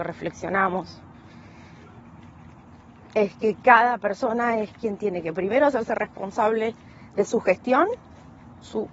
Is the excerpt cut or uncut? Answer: uncut